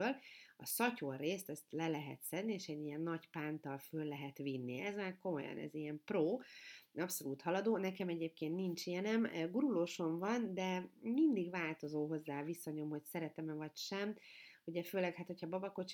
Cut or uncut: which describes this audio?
uncut